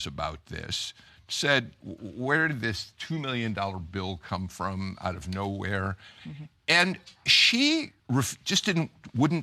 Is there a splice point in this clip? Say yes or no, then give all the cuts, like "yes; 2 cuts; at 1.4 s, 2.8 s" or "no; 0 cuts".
yes; 1 cut; at 8.0 s